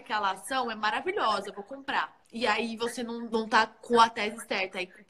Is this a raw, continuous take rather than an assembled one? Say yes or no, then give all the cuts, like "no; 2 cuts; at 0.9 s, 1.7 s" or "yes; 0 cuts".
no; 2 cuts; at 2.2 s, 3.3 s